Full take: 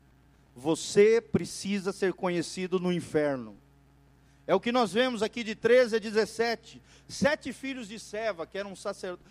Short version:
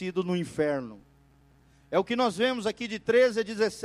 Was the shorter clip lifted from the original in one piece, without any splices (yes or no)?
yes